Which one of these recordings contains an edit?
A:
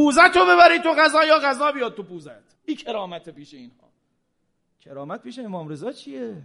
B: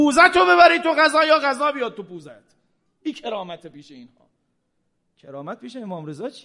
A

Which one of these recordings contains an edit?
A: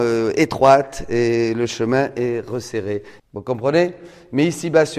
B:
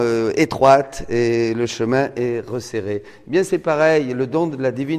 A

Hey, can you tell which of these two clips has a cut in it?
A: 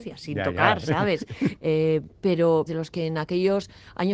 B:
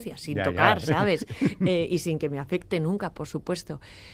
A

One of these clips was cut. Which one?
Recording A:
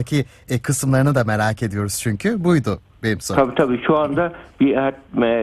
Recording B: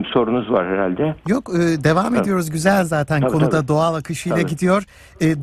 B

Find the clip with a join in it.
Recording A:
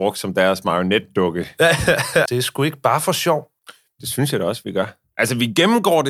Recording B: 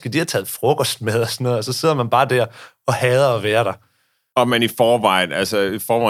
A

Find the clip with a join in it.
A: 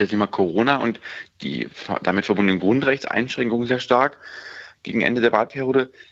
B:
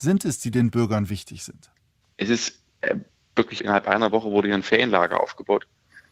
B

